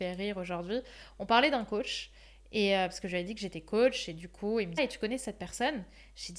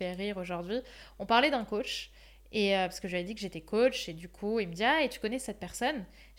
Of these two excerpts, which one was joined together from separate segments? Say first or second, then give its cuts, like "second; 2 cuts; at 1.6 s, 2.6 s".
first; 1 cut; at 4.8 s